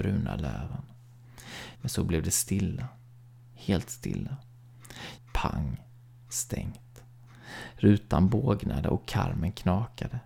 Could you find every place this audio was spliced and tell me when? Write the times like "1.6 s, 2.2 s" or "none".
1.8 s, 5.2 s